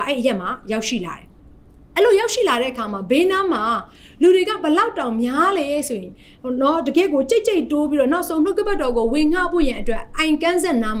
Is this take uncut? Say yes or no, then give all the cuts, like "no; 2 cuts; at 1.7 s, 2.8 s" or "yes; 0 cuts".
no; 1 cut; at 1.4 s